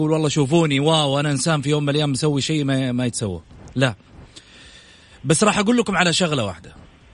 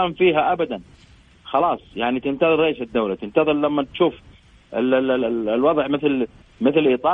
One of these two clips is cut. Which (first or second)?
second